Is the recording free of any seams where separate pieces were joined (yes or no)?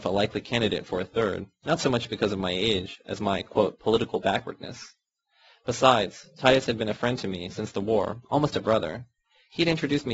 yes